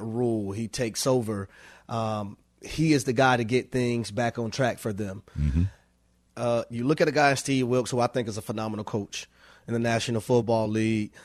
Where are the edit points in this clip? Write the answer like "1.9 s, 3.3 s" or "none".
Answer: 6.3 s